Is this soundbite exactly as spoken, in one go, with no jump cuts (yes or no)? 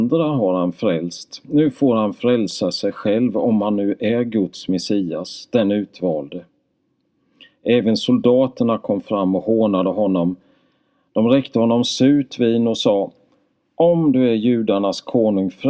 yes